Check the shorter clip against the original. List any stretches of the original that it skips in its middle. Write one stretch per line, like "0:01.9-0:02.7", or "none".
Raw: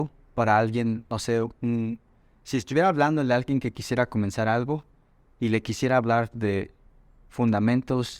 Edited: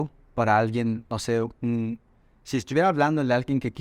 none